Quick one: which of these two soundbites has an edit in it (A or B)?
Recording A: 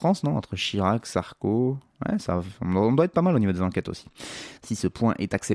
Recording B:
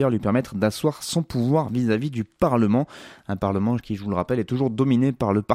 A